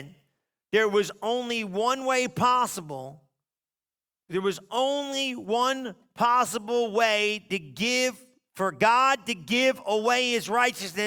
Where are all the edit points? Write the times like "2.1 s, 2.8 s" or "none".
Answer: none